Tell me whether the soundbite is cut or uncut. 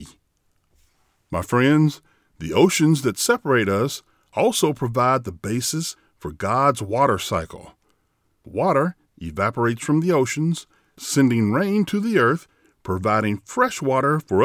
uncut